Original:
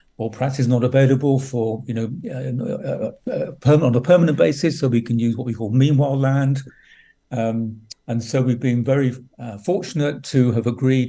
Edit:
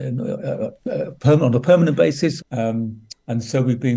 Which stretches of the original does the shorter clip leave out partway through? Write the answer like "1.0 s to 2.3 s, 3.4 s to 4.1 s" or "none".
4.8 s to 7.2 s